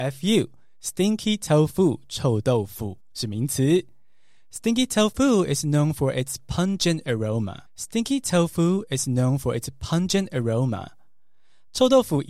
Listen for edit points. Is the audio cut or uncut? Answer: cut